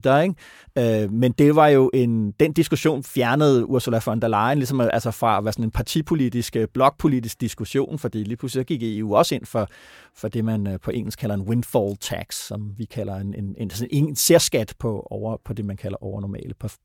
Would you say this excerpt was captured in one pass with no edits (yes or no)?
yes